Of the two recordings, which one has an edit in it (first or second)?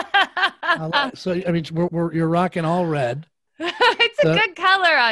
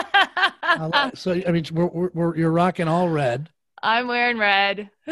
first